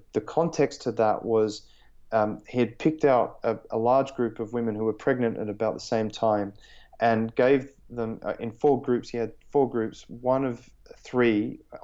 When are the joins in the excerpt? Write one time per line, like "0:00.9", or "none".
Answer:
none